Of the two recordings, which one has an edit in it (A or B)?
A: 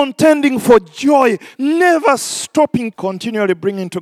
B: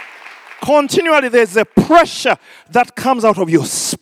A